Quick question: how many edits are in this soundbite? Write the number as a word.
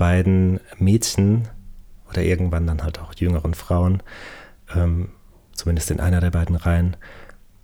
zero